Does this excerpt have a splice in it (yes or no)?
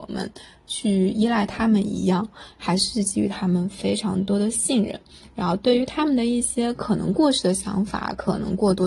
no